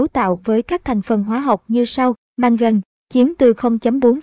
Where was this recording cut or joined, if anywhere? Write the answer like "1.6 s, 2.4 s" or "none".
2.3 s